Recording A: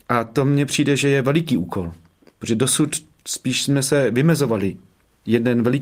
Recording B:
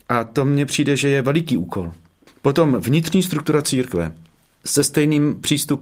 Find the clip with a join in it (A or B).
B